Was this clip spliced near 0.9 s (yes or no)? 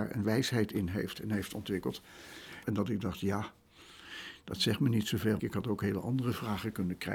no